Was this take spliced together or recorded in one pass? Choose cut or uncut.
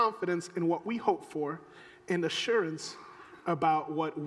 uncut